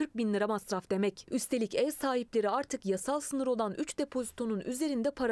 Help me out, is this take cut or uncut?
uncut